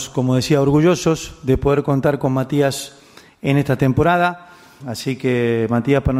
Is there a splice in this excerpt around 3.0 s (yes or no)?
no